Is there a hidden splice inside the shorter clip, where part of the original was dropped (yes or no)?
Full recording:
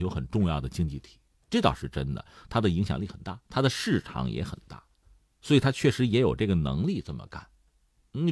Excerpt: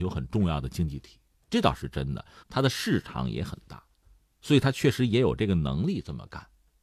yes